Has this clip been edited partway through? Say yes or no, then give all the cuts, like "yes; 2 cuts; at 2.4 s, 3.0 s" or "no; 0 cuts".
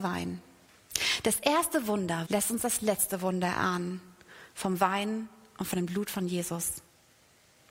yes; 1 cut; at 2.2 s